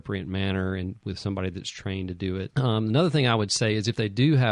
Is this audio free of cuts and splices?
no; 1 cut; at 2.5 s

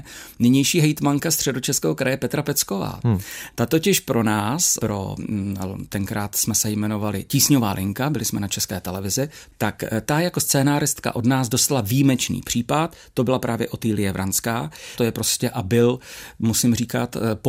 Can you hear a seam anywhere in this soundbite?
no; 0 cuts

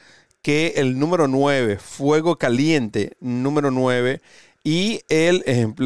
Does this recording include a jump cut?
no; 0 cuts

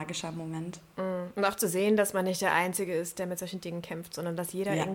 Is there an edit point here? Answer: no; 0 cuts

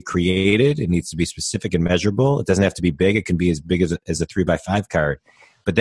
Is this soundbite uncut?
yes; 0 cuts

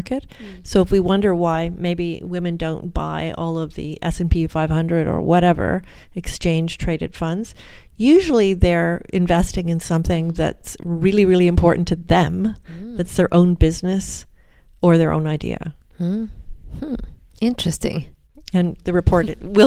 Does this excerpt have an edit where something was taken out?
yes; 1 cut; at 18.3 s

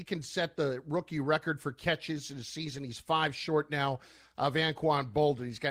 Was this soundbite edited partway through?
no; 0 cuts

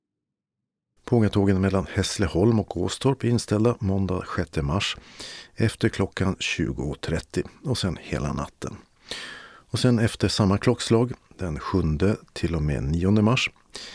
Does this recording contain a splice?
yes; 1 cut; at 1.0 s

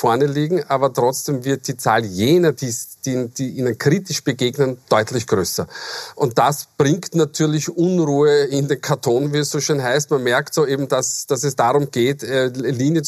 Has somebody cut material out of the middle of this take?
no; 0 cuts

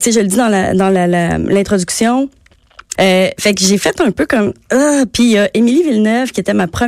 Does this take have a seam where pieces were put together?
yes; 1 cut; at 2.9 s

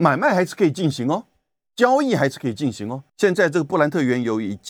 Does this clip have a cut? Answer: yes; 1 cut; at 3.1 s

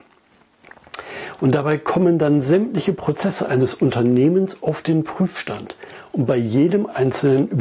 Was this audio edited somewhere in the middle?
no; 0 cuts

